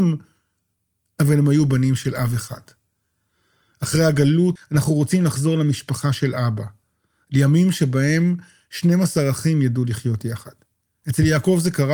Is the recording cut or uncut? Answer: cut